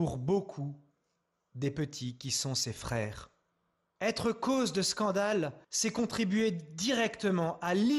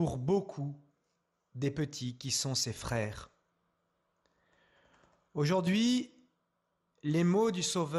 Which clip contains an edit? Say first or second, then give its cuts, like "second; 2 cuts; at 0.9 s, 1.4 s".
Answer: first; 2 cuts; at 3.9 s, 5.6 s